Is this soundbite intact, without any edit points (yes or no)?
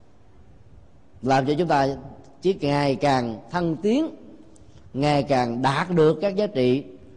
yes